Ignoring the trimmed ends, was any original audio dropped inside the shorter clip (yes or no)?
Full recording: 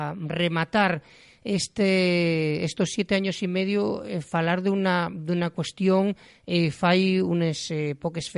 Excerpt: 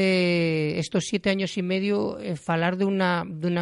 no